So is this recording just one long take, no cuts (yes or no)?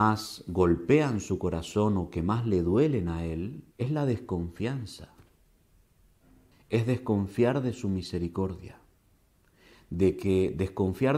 no